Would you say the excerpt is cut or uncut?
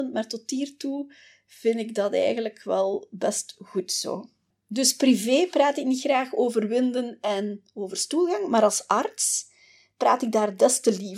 uncut